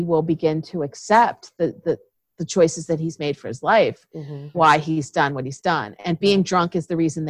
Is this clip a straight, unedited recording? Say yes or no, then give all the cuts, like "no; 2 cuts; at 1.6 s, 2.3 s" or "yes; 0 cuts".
no; 1 cut; at 4.5 s